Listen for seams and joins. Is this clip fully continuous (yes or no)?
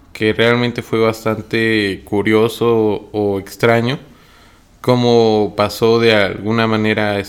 yes